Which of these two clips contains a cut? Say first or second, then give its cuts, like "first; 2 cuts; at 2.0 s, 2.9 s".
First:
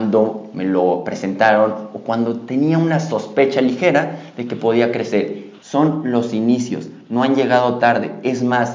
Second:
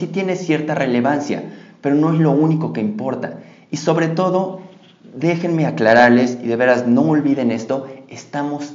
first; 1 cut; at 5.6 s